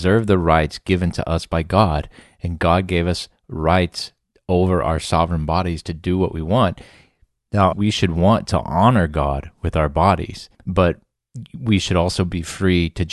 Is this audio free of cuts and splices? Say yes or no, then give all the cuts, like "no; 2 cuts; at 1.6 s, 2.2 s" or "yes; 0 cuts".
no; 2 cuts; at 7.7 s, 10.5 s